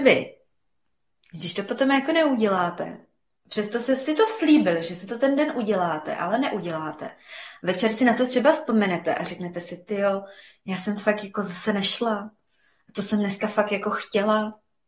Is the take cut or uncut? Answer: uncut